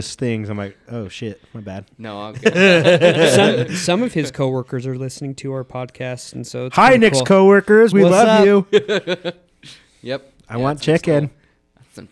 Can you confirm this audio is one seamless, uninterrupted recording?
yes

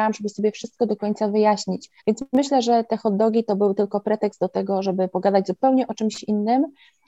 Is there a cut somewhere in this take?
yes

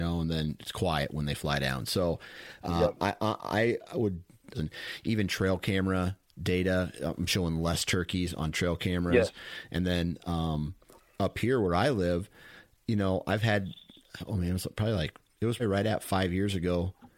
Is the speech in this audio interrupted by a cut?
yes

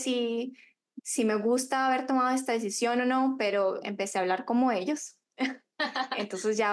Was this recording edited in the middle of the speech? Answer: no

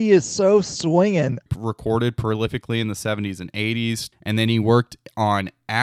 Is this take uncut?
no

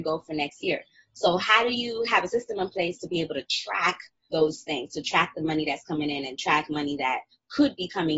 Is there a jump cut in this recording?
yes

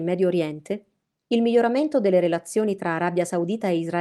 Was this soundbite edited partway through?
no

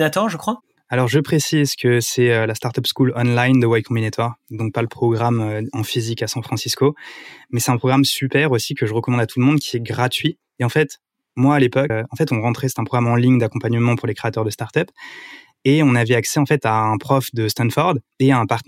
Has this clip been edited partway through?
yes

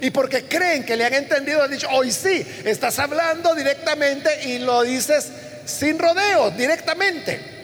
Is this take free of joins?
yes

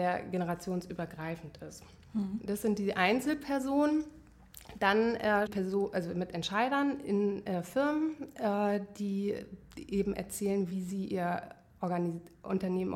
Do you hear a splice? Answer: yes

